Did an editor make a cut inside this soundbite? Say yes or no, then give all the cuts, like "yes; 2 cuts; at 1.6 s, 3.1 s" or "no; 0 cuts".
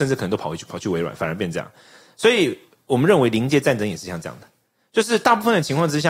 no; 0 cuts